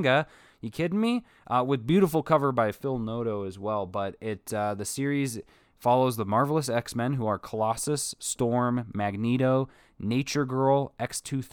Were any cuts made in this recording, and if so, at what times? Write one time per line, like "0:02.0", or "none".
none